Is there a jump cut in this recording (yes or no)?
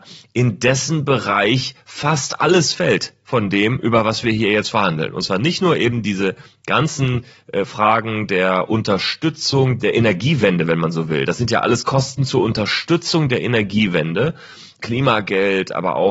no